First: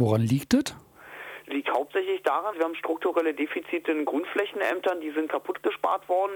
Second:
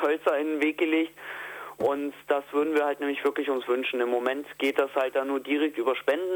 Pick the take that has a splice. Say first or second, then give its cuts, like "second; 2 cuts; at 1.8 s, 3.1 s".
first; 2 cuts; at 2.5 s, 5.3 s